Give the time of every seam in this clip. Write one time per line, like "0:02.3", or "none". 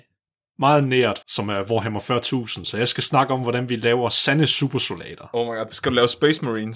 0:01.2

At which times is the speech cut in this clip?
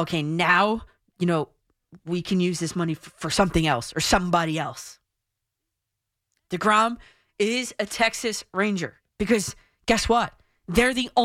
0:09.1

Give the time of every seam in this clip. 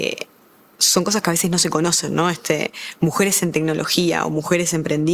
none

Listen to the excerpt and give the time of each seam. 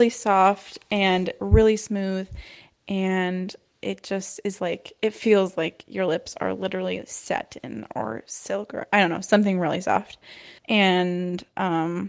0:10.6

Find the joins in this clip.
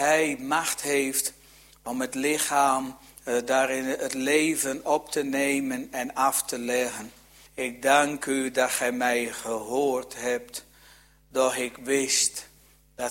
0:07.5

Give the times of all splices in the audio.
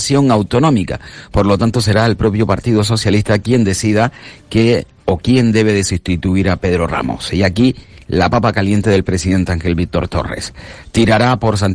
none

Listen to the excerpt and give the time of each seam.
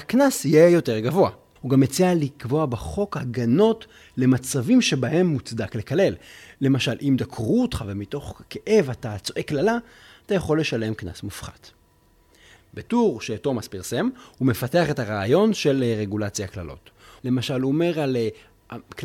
0:01.6
0:12.6
0:17.2

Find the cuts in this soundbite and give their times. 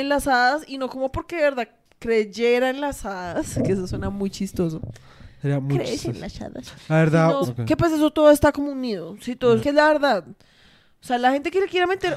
0:07.4
0:09.6

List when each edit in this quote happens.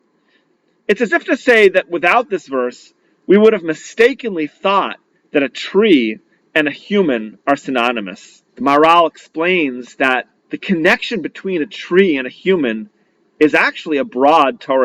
0:08.5
0:10.4

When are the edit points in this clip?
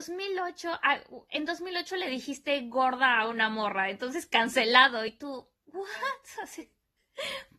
none

